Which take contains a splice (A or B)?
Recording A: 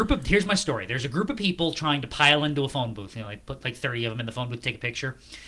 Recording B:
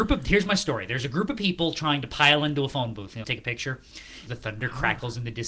B